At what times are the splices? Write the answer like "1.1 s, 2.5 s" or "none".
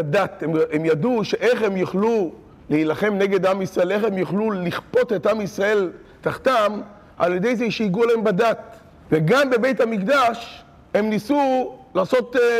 9.1 s